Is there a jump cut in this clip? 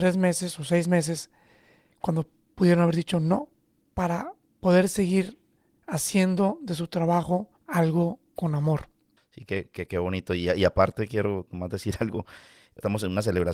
yes; 2 cuts; at 7.6 s, 9.2 s

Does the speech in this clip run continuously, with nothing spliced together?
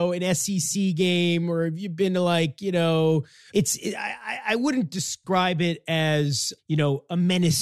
no; 2 cuts; at 3.5 s, 6.6 s

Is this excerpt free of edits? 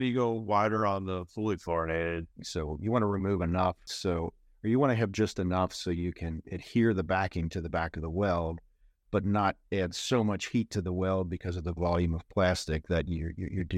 no; 1 cut; at 2.4 s

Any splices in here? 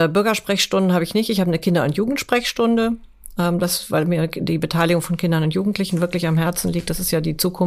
no; 0 cuts

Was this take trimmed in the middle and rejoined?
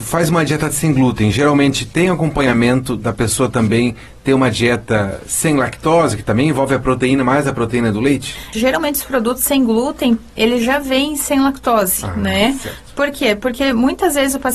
yes; 1 cut; at 8.5 s

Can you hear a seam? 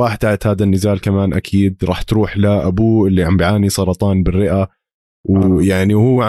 no; 0 cuts

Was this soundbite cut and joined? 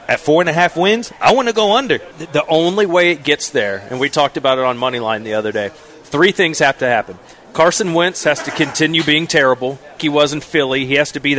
yes; 2 cuts; at 2.1 s, 10.0 s

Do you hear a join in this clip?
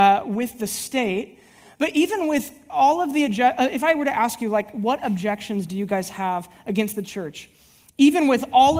no; 0 cuts

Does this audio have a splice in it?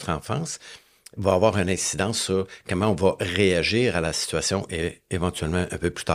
no; 0 cuts

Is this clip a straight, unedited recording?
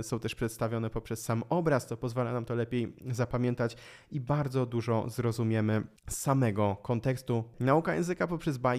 no; 2 cuts; at 6.0 s, 7.5 s

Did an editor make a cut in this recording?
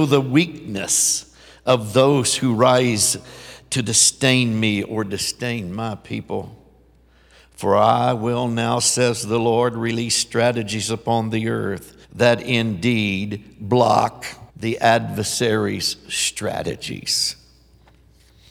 yes; 2 cuts; at 12.0 s, 14.5 s

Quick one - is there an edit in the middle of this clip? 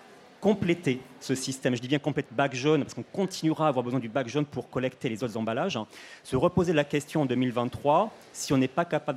yes; 1 cut; at 2.3 s

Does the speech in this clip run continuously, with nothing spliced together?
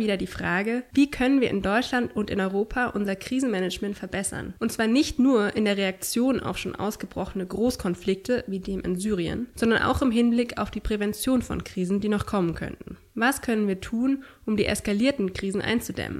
yes; 0 cuts

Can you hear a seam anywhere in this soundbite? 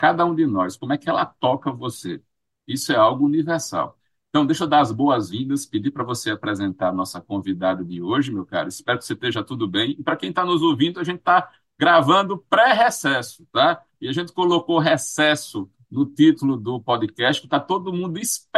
no; 0 cuts

